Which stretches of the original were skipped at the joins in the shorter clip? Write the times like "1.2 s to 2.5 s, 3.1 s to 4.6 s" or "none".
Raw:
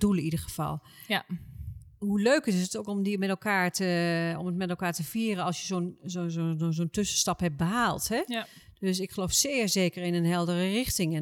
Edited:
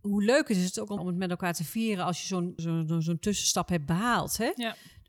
2.9 s to 4.4 s, 6.0 s to 6.3 s